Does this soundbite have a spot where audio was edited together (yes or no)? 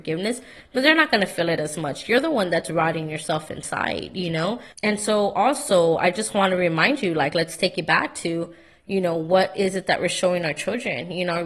yes